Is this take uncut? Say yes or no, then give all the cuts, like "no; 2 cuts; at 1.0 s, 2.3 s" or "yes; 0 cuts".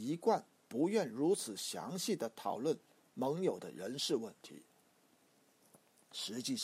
yes; 0 cuts